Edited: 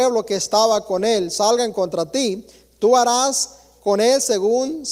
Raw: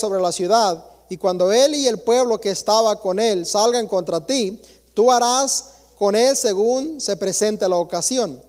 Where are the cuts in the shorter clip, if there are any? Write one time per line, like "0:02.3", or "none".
none